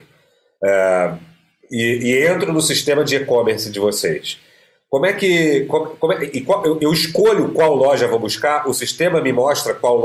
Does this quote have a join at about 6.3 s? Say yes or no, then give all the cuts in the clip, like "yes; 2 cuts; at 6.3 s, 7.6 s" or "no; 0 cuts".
no; 0 cuts